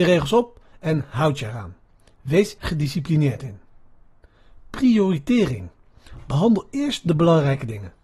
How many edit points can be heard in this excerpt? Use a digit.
1